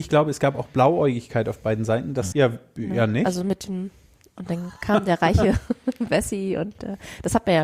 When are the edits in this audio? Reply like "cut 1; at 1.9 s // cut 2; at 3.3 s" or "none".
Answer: cut 1; at 2.3 s